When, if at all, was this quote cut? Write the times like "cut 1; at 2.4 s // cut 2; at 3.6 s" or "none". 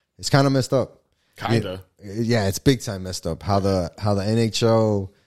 none